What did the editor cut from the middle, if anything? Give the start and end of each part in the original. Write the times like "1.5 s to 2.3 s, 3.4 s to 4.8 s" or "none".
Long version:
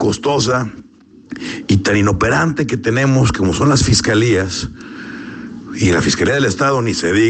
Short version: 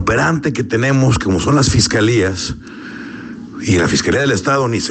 none